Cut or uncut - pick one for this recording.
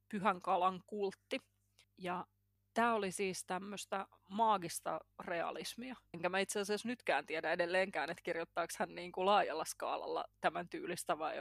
cut